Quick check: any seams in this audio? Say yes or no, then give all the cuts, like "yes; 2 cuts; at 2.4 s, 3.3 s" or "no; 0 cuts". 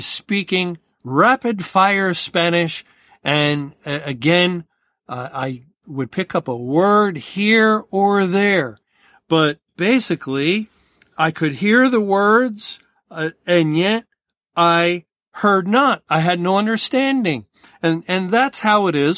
no; 0 cuts